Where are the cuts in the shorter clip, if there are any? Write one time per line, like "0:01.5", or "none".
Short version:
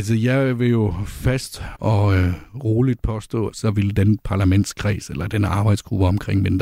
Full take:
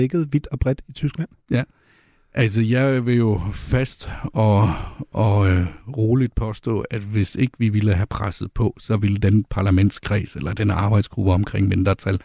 0:01.7
0:03.5